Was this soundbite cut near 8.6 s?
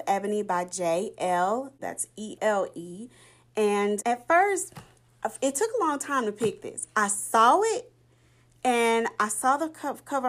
no; 1 cut; at 2.4 s

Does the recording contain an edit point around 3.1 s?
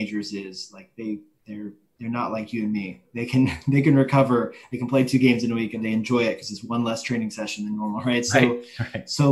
no; 0 cuts

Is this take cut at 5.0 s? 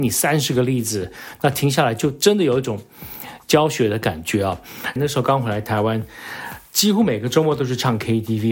yes; 1 cut; at 5.0 s

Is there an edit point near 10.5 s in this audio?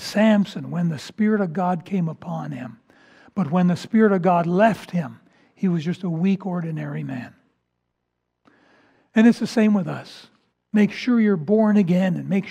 yes; 1 cut; at 10.5 s

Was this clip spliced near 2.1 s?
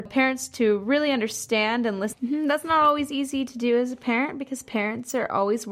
yes; 1 cut; at 2.1 s

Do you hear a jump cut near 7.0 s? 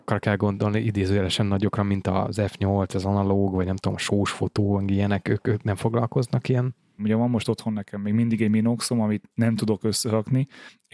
yes; 1 cut; at 7.0 s

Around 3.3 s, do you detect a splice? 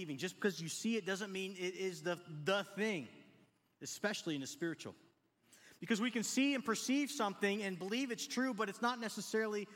no; 0 cuts

